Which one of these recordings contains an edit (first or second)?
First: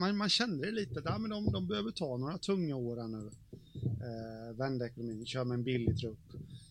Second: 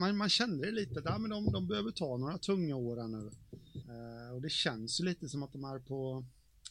second